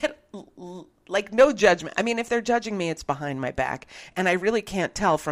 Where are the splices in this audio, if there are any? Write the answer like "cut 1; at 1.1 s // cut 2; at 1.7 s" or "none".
none